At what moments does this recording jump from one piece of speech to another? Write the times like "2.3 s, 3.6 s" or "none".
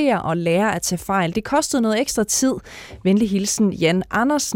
none